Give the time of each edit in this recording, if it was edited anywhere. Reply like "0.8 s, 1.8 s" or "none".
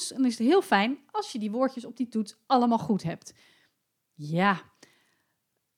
none